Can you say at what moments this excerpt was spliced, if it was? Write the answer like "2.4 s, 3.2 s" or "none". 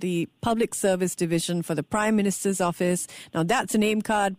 none